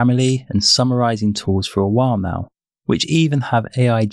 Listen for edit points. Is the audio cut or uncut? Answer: uncut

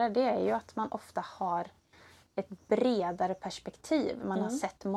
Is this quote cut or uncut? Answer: uncut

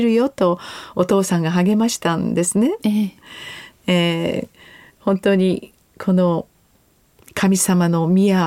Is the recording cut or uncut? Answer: uncut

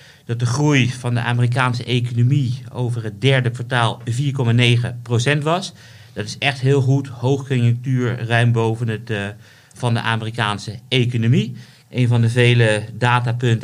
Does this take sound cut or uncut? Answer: cut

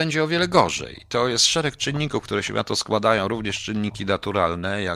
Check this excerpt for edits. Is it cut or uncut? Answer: uncut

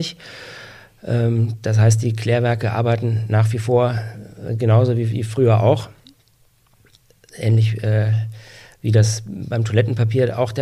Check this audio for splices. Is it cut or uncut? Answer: uncut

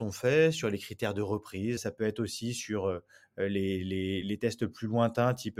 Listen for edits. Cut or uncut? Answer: cut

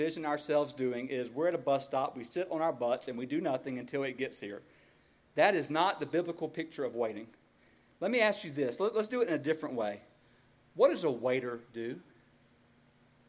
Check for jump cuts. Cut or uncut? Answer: uncut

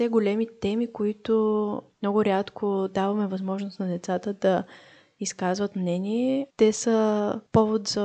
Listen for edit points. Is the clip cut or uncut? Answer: cut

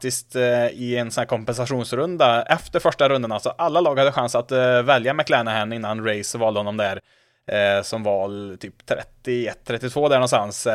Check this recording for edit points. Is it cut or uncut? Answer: uncut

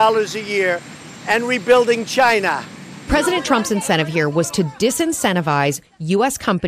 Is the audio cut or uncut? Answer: cut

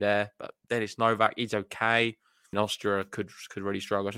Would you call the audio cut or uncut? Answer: cut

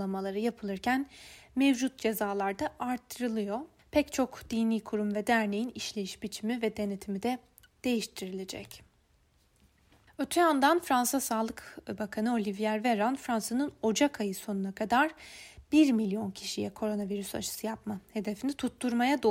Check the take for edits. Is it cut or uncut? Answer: uncut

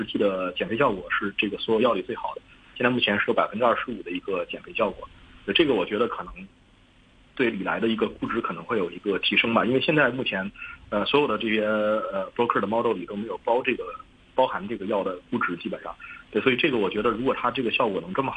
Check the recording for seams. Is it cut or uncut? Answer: uncut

